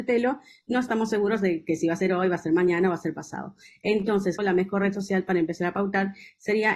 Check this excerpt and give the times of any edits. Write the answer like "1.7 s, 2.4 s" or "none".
4.4 s